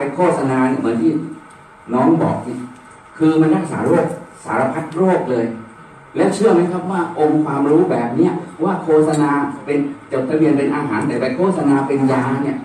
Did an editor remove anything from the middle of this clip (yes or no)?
no